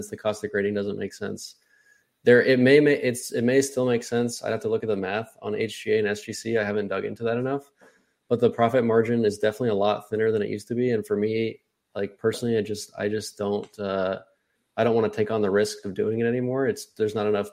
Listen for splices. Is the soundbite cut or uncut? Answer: uncut